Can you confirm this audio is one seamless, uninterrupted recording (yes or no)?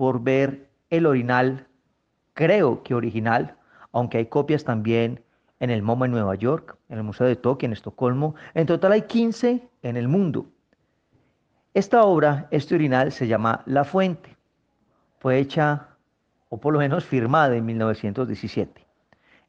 yes